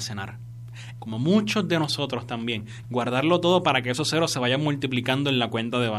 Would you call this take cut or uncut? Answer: cut